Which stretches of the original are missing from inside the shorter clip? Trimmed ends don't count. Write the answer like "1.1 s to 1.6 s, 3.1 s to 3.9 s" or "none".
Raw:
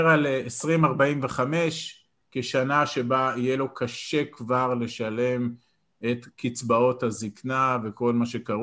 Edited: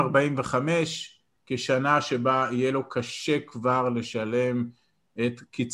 none